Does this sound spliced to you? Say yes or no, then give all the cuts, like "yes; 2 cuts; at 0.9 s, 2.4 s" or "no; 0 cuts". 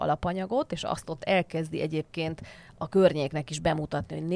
no; 0 cuts